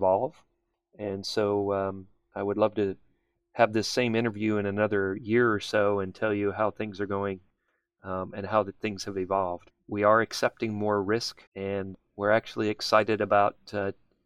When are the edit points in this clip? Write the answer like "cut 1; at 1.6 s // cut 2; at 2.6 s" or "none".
cut 1; at 9.7 s // cut 2; at 11.5 s